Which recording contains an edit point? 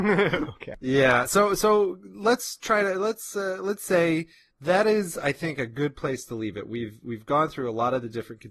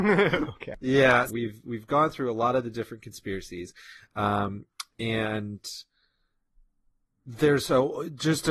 second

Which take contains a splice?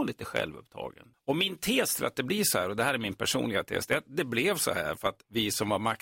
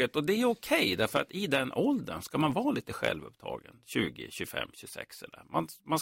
first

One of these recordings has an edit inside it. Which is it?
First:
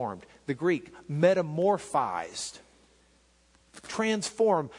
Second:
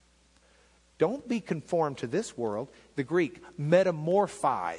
second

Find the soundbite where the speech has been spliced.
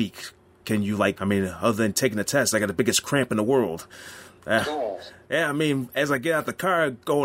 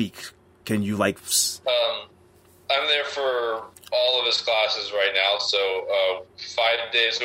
first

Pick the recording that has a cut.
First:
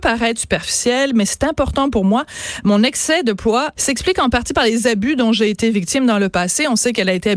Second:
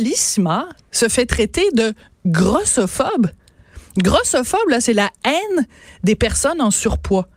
first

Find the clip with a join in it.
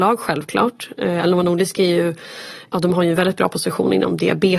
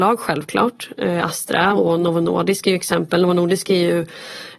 first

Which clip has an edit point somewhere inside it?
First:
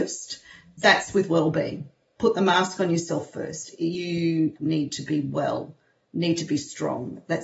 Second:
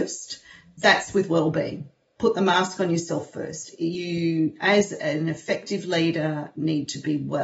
first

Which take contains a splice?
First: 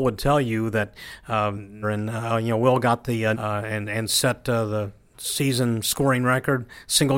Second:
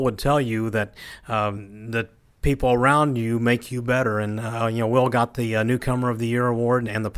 first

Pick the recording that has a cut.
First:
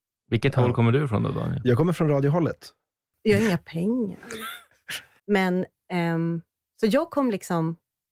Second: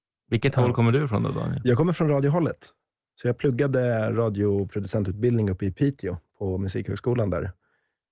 first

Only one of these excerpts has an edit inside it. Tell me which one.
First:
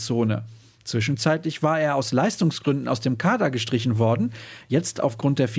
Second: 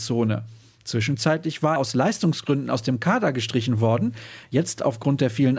second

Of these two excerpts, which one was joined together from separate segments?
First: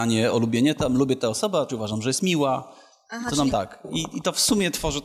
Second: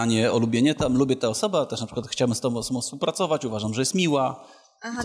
first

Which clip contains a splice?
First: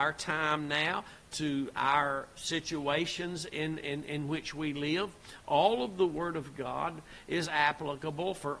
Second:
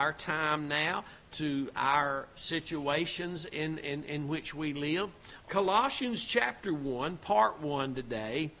second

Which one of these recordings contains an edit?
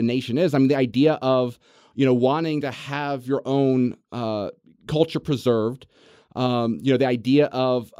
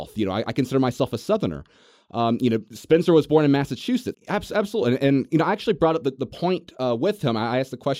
second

